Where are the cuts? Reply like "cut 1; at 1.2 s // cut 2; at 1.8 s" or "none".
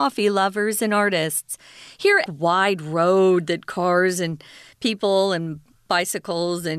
cut 1; at 2.3 s